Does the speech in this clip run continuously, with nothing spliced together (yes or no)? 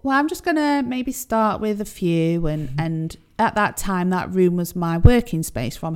yes